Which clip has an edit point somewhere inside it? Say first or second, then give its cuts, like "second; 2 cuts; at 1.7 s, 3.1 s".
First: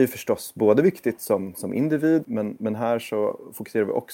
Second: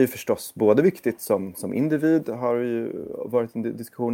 first; 1 cut; at 2.2 s